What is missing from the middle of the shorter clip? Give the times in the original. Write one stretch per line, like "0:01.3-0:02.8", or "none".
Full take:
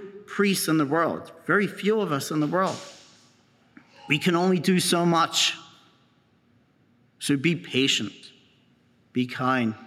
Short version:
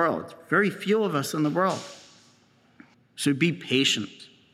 0:03.9-0:07.0

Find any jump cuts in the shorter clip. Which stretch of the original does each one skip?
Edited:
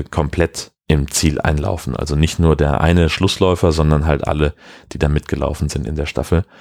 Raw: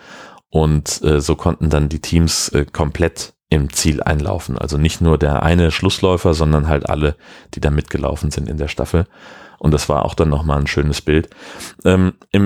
none

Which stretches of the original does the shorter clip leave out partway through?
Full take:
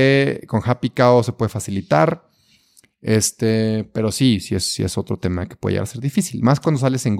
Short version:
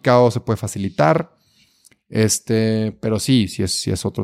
none

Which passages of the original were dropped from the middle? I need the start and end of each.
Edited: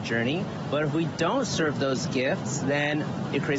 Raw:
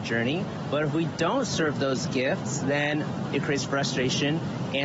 none

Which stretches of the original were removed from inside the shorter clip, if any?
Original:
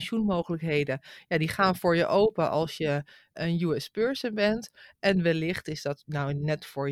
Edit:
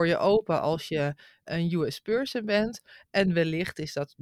none

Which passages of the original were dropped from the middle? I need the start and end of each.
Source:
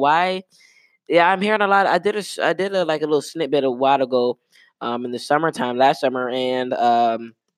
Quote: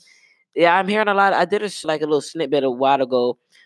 0:02.4-0:02.8

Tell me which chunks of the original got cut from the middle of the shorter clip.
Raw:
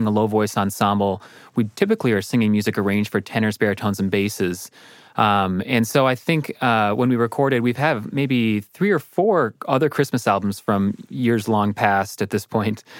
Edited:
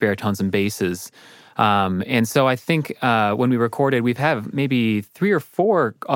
none

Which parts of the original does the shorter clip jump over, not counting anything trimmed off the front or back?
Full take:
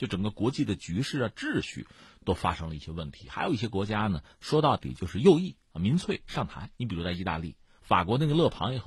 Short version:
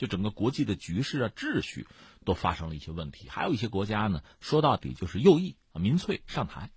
none

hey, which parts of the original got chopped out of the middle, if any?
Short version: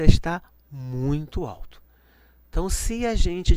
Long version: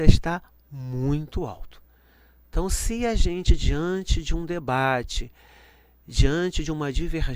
none

